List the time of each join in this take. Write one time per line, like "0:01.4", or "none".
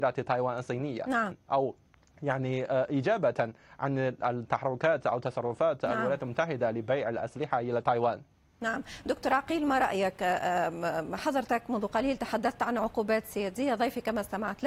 0:01.3